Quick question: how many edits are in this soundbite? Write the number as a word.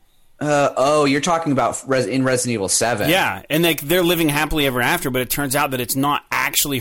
zero